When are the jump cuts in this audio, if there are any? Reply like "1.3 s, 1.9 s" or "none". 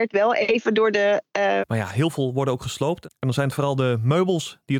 1.6 s